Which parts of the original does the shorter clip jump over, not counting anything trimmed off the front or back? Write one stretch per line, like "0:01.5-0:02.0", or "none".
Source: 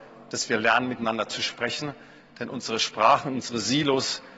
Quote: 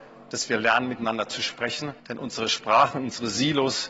0:02.0-0:02.3